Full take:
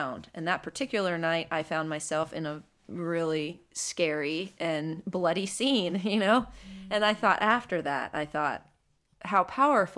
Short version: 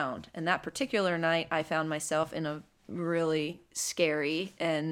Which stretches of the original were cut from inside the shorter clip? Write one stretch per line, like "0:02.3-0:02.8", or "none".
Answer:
none